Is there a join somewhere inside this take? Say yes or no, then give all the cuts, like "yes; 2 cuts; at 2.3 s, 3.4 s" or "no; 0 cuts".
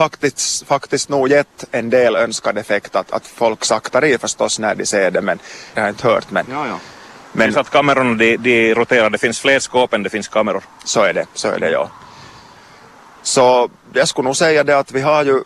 yes; 1 cut; at 5.7 s